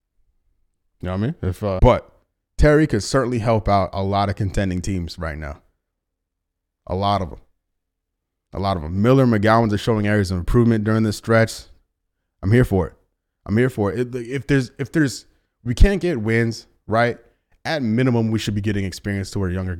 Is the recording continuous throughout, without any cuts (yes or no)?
no